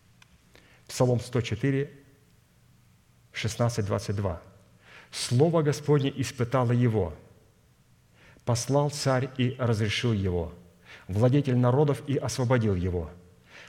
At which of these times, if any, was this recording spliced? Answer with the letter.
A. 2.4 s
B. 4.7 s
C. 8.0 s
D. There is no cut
D